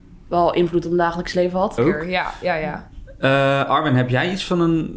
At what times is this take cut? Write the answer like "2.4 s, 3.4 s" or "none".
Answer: 1.8 s